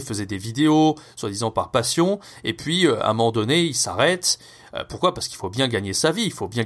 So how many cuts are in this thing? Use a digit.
0